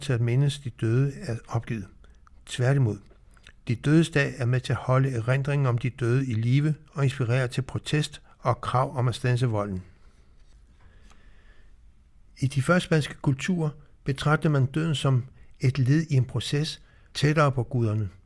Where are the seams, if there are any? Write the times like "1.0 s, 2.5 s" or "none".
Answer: 17.1 s